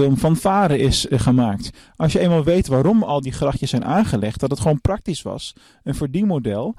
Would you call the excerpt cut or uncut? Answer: uncut